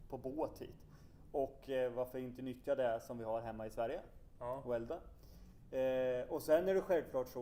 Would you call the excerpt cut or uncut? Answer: uncut